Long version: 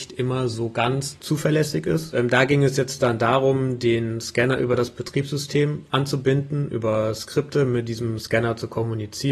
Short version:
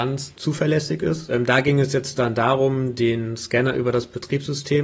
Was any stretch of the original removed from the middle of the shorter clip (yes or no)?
no